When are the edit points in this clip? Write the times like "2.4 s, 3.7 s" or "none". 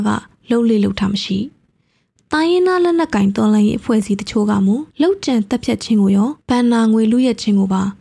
4.9 s, 6.4 s